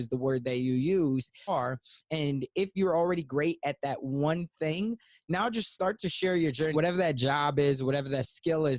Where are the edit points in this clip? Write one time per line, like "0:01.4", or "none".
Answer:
0:01.5
0:06.7